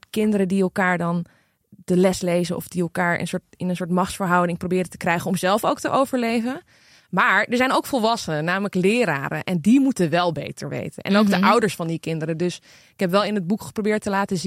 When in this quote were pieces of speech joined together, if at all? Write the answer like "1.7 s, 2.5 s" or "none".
none